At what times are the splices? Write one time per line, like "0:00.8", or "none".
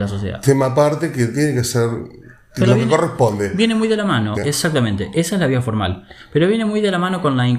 0:04.3